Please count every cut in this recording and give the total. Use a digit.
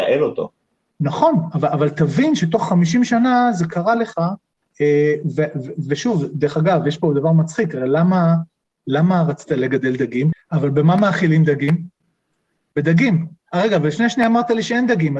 1